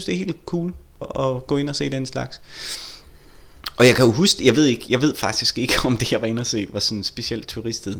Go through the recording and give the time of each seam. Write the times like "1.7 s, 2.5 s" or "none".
1.0 s